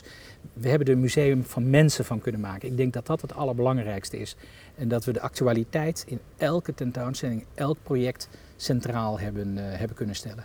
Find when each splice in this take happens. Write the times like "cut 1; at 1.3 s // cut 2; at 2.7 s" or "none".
cut 1; at 4.7 s